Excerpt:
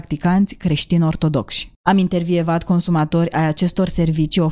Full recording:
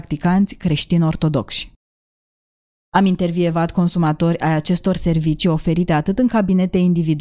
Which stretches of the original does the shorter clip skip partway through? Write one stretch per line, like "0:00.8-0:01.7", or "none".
0:01.7-0:02.8